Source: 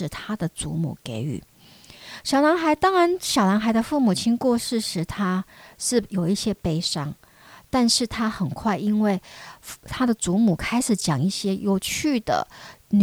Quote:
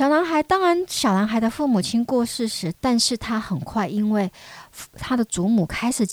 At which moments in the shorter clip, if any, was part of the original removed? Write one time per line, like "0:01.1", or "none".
0:02.7